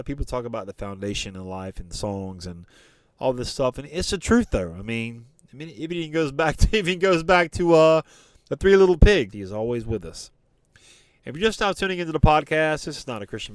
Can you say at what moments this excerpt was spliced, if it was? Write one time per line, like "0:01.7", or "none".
0:09.3